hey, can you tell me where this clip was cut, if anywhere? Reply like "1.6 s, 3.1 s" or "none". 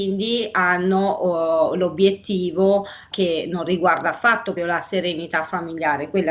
3.1 s, 4.6 s